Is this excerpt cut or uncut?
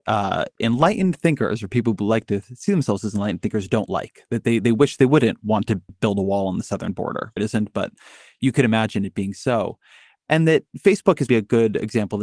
cut